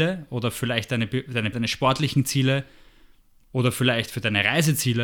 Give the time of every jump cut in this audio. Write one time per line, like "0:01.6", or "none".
0:01.5